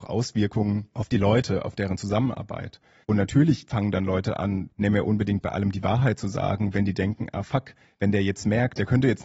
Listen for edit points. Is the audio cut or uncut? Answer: cut